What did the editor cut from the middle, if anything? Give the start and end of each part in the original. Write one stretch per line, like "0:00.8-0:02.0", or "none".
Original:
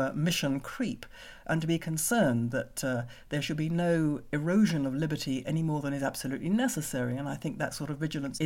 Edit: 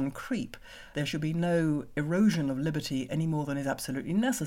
0:01.4-0:03.3